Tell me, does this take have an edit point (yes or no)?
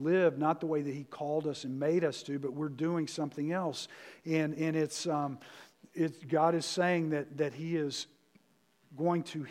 no